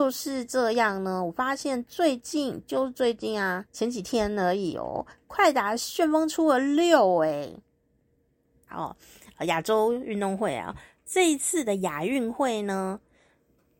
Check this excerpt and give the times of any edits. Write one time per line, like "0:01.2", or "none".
0:03.7
0:08.7